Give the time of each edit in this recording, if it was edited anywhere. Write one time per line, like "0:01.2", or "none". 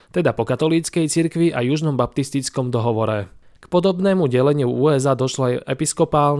0:03.6